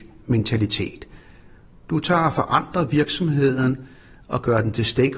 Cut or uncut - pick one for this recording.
uncut